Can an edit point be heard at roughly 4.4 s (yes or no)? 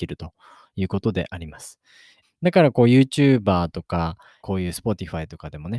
yes